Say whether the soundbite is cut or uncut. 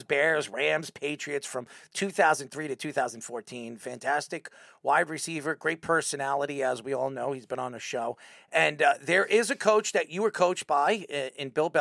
uncut